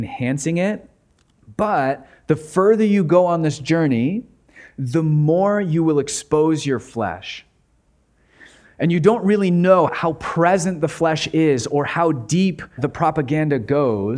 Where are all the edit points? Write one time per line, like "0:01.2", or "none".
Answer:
0:09.9
0:12.8